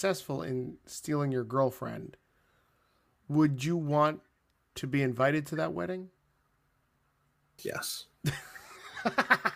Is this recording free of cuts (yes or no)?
no